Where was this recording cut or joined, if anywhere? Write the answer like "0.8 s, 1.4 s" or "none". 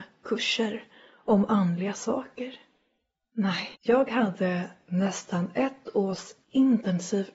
3.7 s